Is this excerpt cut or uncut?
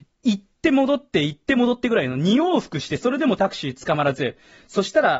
uncut